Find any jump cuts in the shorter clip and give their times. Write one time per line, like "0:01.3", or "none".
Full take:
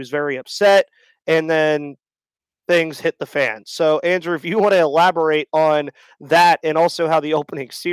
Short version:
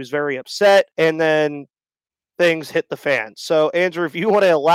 0:00.9